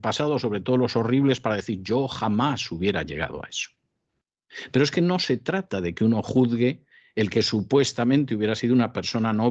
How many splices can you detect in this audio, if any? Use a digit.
0